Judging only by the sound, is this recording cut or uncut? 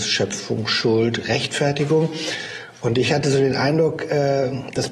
uncut